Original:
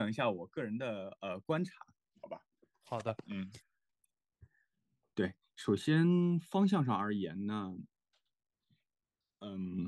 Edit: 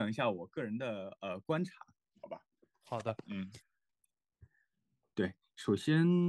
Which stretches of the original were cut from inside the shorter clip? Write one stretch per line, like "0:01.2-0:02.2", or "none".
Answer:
none